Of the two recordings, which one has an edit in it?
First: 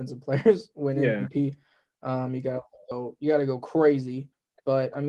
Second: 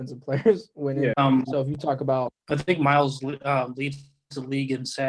second; 1 cut; at 1.1 s

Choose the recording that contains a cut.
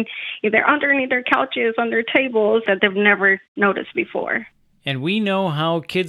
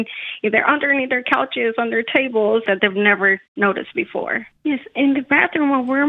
second; 1 cut; at 4.6 s

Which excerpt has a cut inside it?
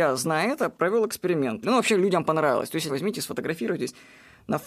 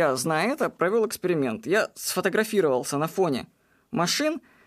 first; 2 cuts; at 1.6 s, 2.9 s

